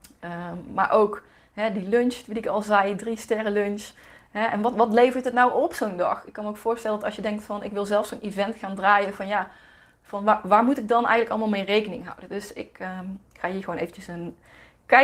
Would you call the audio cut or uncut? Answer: uncut